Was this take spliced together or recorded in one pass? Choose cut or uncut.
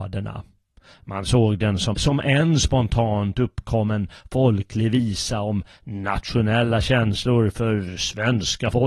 cut